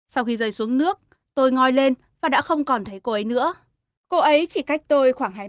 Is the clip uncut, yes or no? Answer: no